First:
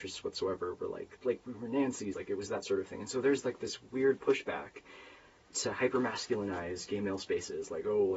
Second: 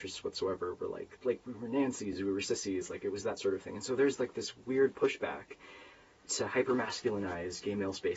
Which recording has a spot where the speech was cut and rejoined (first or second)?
first